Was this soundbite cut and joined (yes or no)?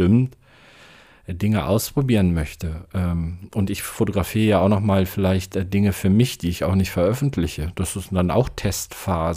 no